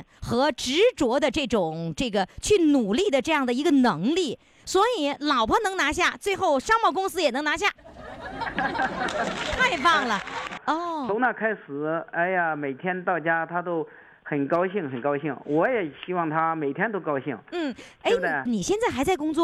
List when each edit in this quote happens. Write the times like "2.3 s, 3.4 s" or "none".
10.6 s, 18.5 s